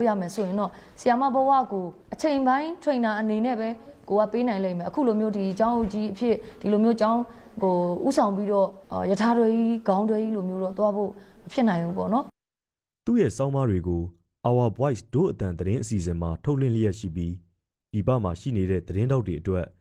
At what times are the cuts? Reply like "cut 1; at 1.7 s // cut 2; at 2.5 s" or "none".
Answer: cut 1; at 2.0 s // cut 2; at 8.8 s